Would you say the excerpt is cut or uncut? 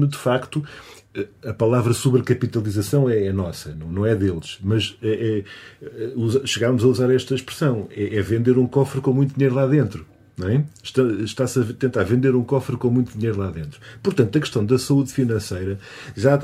uncut